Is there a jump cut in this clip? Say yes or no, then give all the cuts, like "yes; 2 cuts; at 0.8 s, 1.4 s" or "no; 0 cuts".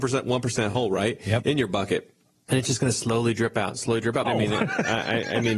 yes; 1 cut; at 4.2 s